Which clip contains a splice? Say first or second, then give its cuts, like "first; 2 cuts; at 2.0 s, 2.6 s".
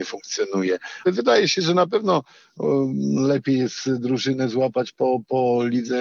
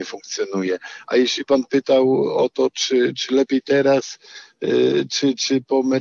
first; 1 cut; at 1.0 s